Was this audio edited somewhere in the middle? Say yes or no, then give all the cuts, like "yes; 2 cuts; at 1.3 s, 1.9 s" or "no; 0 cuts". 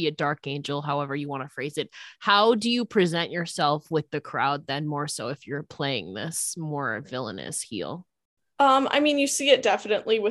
no; 0 cuts